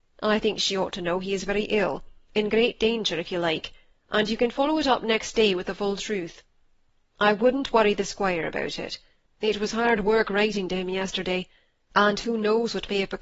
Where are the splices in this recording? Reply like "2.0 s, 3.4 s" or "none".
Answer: 9.3 s